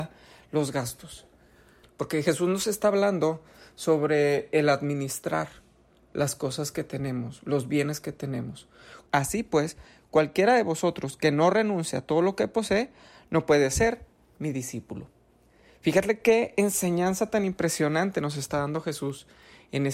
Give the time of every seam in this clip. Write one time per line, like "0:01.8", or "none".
0:01.8
0:09.1